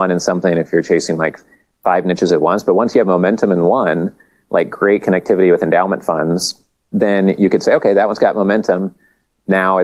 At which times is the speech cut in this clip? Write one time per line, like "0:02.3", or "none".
0:06.9